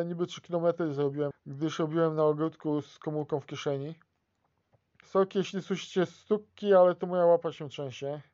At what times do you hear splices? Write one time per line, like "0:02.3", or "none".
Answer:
0:01.3
0:05.0